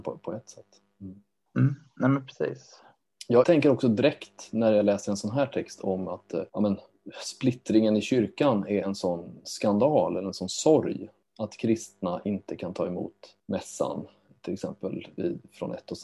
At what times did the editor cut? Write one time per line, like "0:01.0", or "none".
0:03.4
0:06.5